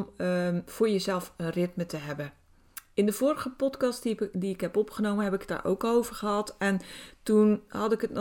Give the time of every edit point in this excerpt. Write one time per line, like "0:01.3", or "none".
none